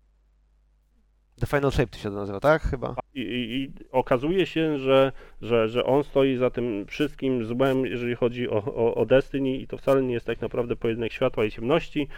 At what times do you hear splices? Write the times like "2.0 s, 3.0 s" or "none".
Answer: 3.0 s